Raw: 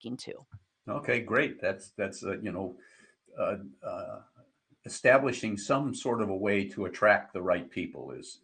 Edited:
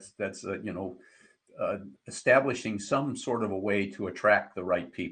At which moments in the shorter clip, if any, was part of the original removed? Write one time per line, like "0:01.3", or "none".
0:02.0